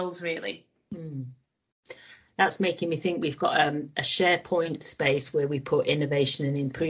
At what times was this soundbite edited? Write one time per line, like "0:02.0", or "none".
none